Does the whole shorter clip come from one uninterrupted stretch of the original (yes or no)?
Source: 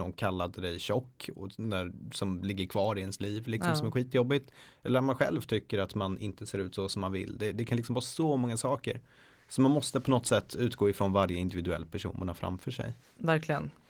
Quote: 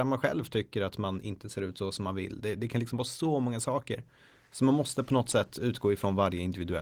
yes